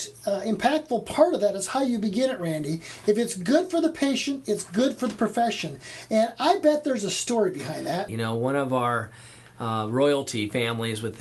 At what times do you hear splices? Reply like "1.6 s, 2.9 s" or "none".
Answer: 8.1 s

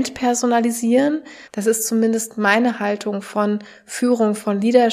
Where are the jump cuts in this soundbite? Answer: 1.5 s

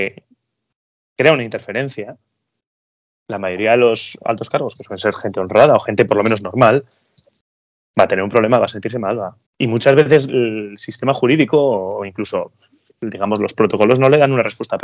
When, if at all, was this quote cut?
9.5 s

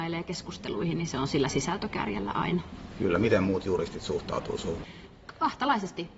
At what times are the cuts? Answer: none

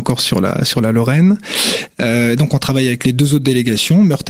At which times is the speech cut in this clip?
none

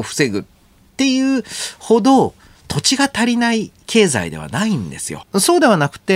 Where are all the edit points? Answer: 5.2 s

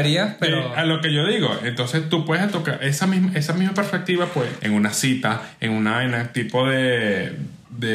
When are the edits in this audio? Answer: 4.6 s

